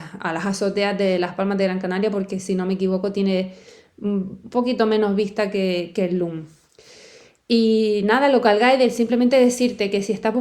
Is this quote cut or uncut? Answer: uncut